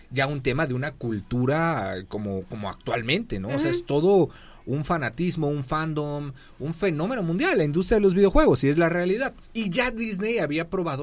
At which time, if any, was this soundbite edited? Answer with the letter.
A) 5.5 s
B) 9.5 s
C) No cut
B